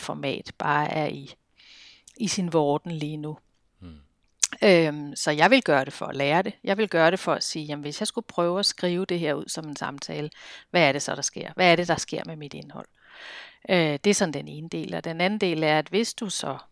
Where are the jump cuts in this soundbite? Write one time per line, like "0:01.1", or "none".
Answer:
none